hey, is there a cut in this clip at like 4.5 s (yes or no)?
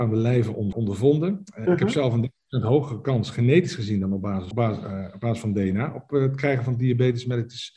no